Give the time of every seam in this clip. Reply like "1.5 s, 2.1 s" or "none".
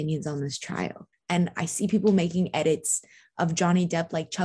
1.1 s